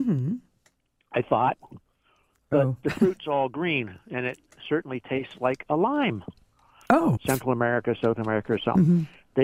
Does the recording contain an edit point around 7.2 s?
yes; 1 cut; at 7.2 s

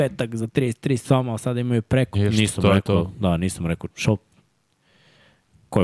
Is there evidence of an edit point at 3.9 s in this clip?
yes; 2 cuts; at 2.1 s, 3.9 s

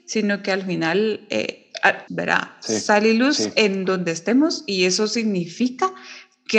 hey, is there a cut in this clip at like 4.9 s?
no; 1 cut; at 2.1 s

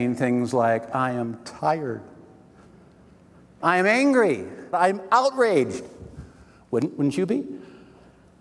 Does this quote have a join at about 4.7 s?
yes; 1 cut; at 4.7 s

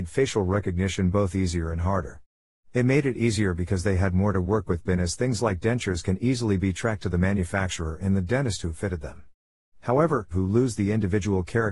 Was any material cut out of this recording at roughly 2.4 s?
no; 1 cut; at 10.3 s

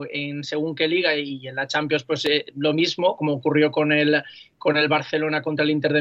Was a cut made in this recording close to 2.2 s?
no; 0 cuts

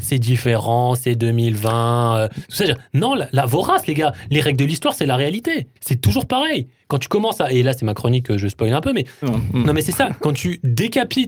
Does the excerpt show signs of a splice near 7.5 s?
no; 2 cuts; at 5.8 s, 9.2 s

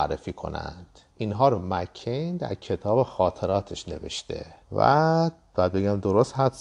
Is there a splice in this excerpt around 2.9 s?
no; 2 cuts; at 1.1 s, 4.6 s

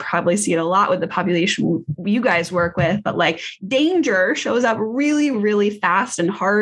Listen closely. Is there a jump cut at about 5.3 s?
yes; 1 cut; at 5.3 s

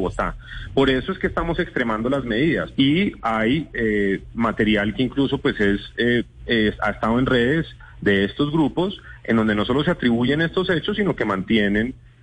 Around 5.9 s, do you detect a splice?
no; 1 cut; at 2.7 s

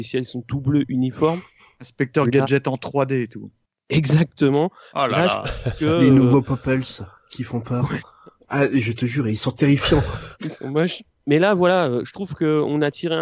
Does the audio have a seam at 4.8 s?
no; 2 cuts; at 8.4 s, 10.3 s

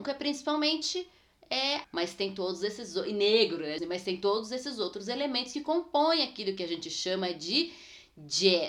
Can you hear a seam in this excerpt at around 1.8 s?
yes; 2 cuts; at 1.8 s, 3.8 s

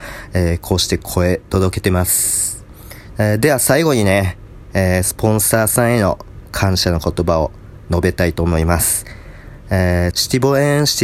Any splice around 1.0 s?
no; 2 cuts; at 3.1 s, 10.1 s

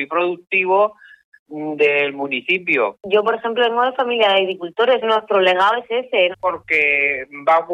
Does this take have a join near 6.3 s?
yes; 2 cuts; at 5.0 s, 6.3 s

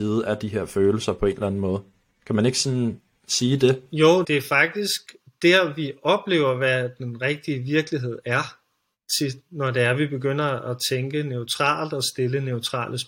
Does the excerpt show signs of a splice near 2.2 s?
no; 1 cut; at 4.2 s

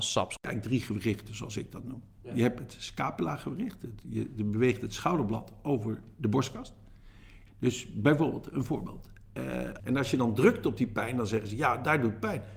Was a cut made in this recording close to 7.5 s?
yes; 2 cuts; at 7.5 s, 9.8 s

